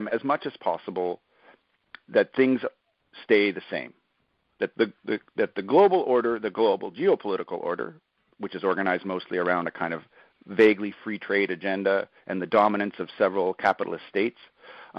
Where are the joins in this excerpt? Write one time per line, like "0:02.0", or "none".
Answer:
0:04.7